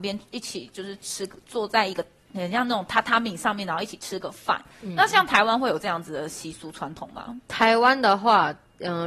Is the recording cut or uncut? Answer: uncut